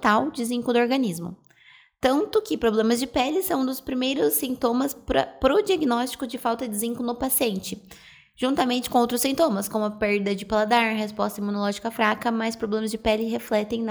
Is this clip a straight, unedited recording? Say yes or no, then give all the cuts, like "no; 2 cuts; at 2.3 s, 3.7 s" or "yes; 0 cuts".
yes; 0 cuts